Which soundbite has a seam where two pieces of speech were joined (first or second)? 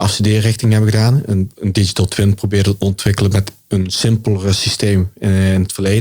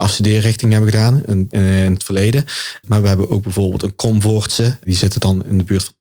second